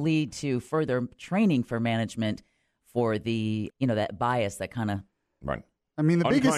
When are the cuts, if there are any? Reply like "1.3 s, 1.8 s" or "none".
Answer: 3.7 s